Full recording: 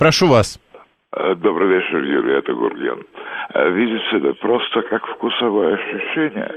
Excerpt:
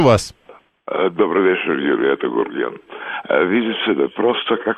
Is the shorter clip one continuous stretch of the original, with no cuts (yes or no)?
yes